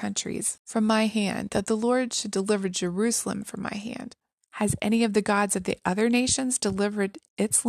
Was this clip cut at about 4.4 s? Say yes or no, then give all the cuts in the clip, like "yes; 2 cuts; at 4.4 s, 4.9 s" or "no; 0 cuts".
yes; 1 cut; at 4.4 s